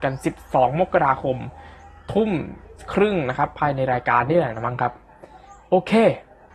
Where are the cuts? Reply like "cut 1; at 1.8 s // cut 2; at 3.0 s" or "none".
none

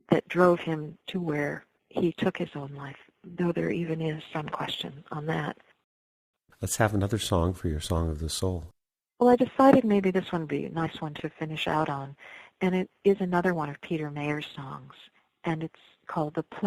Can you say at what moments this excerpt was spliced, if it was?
none

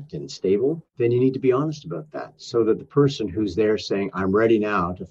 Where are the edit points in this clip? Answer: none

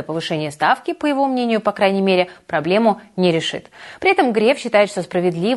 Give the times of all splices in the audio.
none

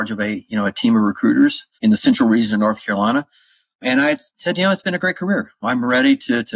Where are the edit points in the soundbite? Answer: cut 1; at 1.7 s

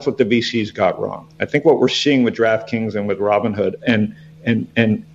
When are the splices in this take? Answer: cut 1; at 3.8 s

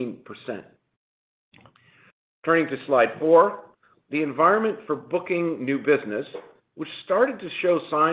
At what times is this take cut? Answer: cut 1; at 3.9 s

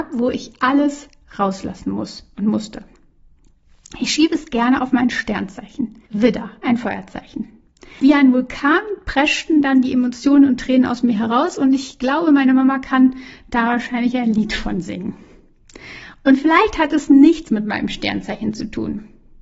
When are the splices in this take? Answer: cut 1; at 6.1 s // cut 2; at 8.0 s

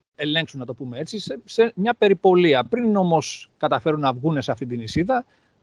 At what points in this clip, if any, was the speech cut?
none

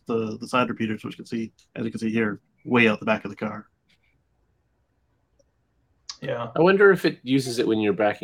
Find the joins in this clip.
none

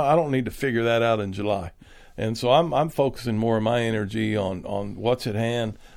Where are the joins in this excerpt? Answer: none

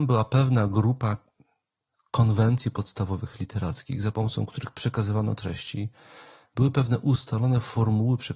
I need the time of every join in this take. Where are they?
none

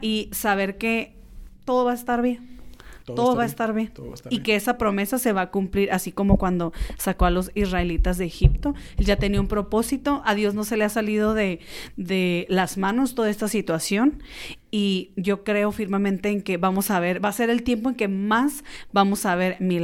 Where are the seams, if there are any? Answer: none

